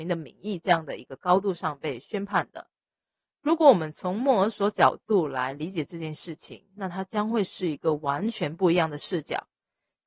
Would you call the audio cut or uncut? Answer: uncut